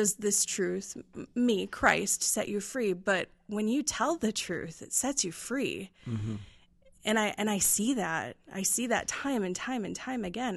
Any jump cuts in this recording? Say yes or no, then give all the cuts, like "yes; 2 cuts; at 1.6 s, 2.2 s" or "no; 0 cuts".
no; 0 cuts